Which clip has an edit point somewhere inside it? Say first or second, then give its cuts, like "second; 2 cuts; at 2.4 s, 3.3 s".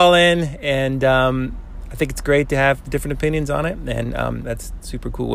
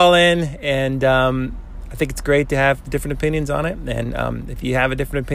first; 1 cut; at 4.4 s